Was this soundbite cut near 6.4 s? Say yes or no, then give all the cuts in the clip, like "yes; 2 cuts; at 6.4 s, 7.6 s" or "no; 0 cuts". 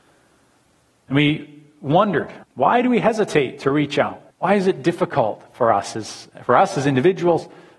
no; 2 cuts; at 2.4 s, 4.3 s